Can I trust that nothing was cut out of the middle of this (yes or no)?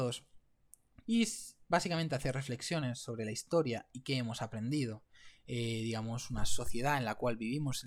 no